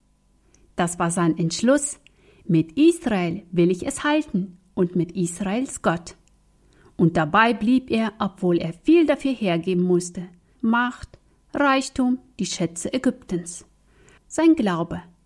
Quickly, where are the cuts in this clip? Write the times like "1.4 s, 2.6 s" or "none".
10.6 s, 14.2 s